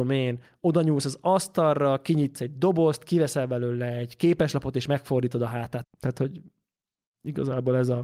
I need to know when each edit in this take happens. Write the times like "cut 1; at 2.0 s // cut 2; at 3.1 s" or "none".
cut 1; at 5.8 s